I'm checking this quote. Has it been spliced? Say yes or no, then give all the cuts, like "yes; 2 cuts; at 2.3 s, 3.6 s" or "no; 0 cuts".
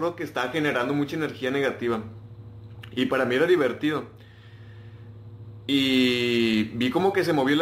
no; 0 cuts